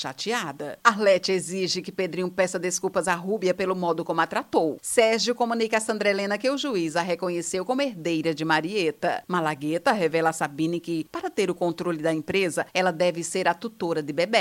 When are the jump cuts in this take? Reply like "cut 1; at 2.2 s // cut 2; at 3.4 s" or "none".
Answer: none